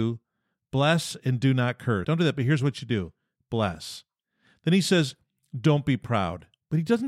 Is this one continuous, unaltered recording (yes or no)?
no